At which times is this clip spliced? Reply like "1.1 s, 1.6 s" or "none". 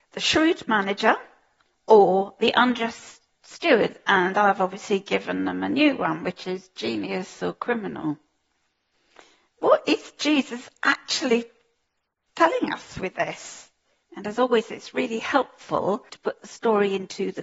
14.0 s, 16.1 s